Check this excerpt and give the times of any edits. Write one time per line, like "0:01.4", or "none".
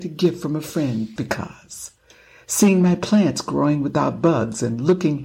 0:01.2